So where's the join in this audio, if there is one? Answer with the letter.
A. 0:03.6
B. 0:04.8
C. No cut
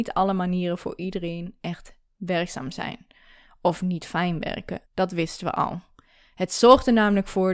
B